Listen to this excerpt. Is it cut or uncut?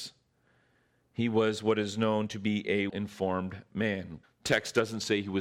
cut